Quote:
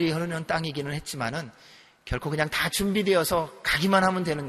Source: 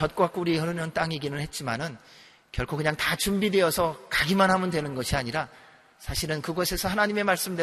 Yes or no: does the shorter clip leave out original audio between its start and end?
no